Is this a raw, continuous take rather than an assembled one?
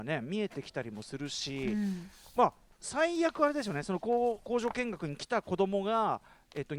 yes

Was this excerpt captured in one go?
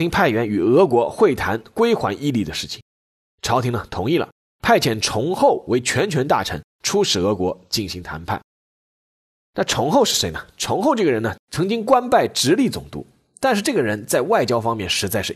yes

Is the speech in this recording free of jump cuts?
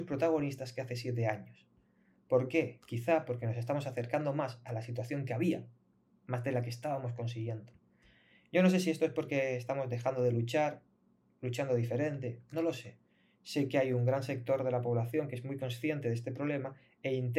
yes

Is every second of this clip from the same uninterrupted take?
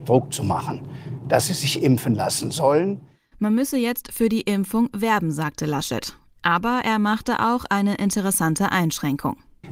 yes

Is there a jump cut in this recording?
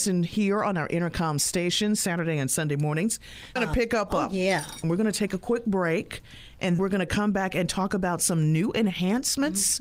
yes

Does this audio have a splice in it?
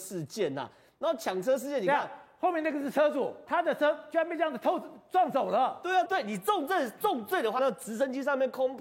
yes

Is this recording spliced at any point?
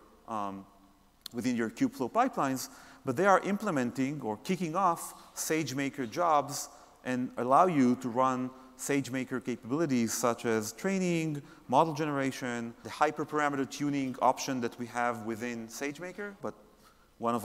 yes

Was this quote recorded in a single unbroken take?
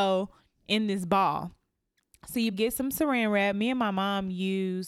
no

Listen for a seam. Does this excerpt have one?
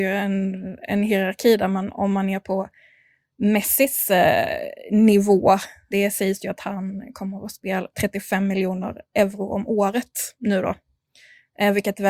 yes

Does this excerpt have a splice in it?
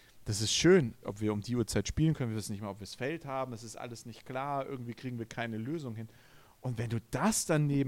yes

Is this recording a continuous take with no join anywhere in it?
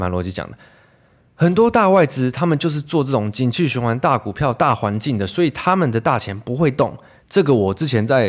no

